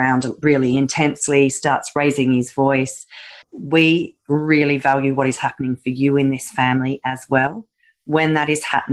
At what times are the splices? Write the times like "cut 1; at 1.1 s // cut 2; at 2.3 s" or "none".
cut 1; at 3.4 s